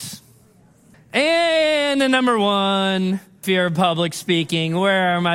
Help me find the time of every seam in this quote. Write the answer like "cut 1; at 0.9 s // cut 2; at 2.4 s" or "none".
cut 1; at 0.9 s // cut 2; at 3.4 s